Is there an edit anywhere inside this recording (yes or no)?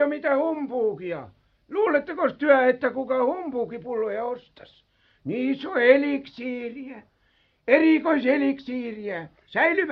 no